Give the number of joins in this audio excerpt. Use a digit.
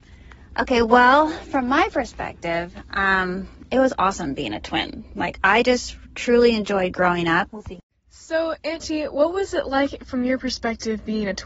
1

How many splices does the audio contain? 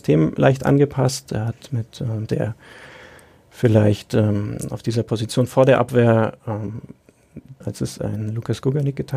2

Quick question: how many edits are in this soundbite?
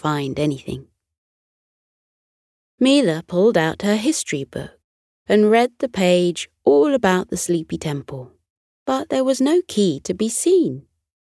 1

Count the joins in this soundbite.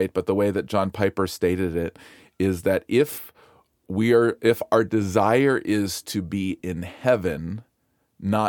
0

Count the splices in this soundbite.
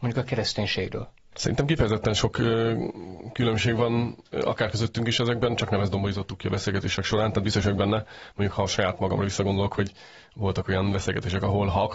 1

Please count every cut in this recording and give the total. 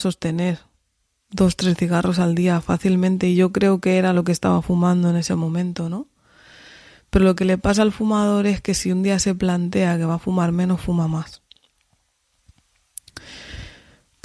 0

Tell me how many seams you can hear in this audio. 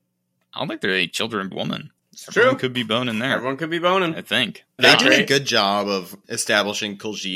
2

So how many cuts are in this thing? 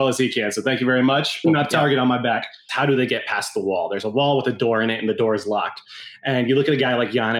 2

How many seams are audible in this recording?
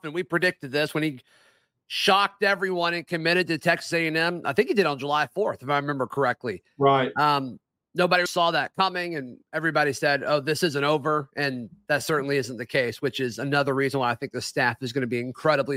1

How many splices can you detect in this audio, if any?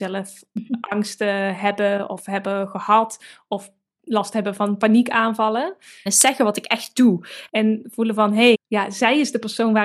3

